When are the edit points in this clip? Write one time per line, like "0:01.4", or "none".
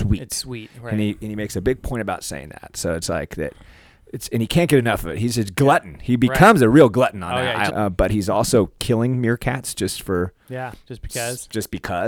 0:07.7
0:08.8